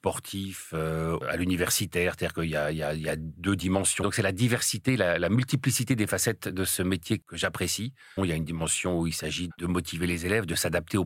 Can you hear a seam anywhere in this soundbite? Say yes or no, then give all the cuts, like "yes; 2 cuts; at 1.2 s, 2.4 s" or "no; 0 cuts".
yes; 3 cuts; at 4.0 s, 8.2 s, 9.5 s